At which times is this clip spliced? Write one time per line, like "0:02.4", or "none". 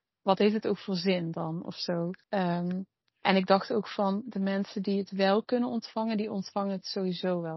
0:02.2